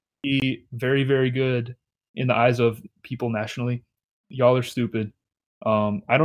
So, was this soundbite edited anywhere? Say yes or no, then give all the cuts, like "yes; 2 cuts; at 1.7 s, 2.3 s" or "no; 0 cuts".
no; 0 cuts